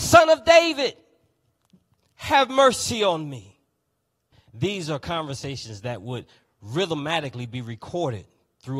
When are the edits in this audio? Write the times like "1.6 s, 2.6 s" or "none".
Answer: 4.3 s